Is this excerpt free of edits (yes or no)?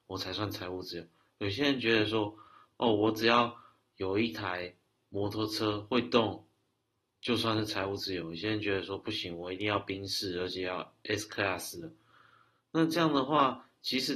yes